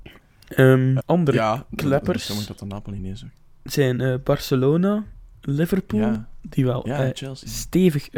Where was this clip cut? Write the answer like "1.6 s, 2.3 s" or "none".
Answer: 1.0 s